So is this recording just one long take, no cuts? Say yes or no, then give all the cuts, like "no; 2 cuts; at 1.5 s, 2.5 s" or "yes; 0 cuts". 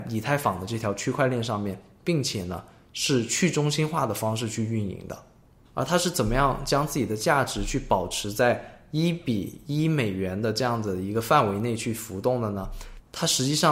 yes; 0 cuts